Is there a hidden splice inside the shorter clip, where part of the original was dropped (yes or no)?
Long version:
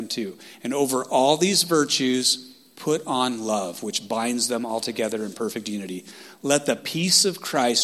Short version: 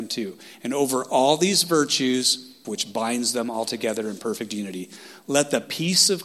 yes